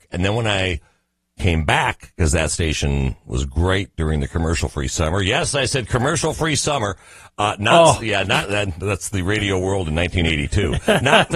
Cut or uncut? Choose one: uncut